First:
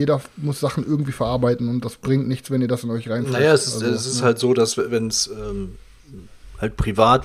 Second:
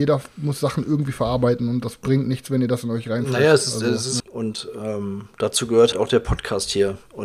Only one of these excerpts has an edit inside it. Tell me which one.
second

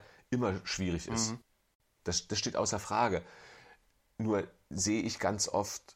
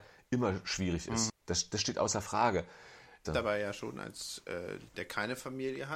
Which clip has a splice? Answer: second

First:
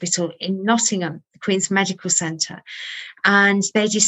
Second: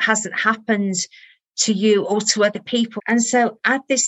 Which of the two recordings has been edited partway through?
second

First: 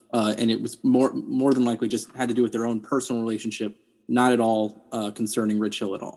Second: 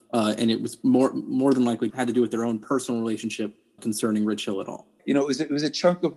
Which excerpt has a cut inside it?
second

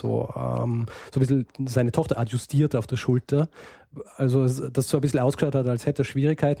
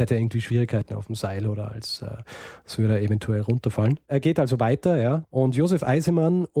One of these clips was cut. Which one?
second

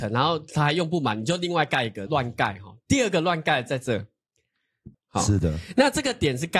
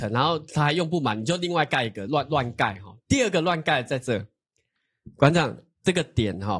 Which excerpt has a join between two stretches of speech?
first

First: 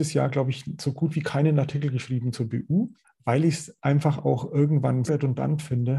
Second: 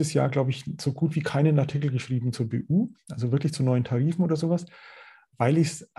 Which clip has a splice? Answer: first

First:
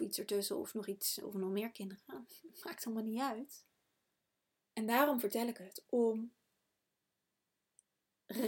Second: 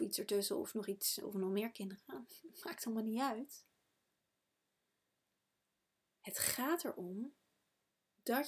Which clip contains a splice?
first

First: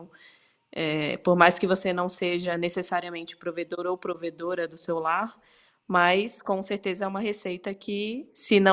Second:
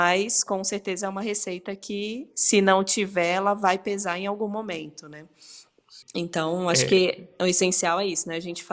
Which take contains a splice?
second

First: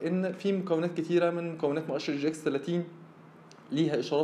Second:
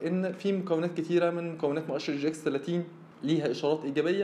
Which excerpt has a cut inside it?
second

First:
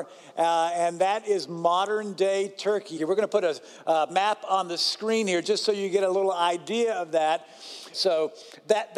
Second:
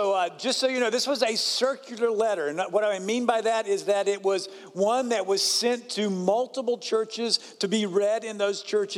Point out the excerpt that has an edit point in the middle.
first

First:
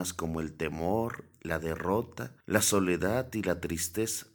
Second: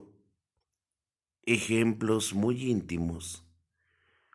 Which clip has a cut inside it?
first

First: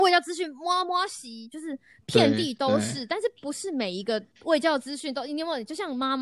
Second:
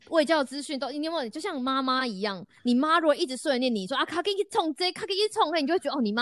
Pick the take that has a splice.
first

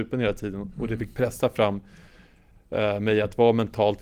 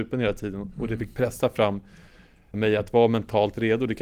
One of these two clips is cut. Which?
second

